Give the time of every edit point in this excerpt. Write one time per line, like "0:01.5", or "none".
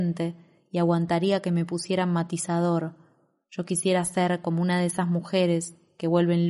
none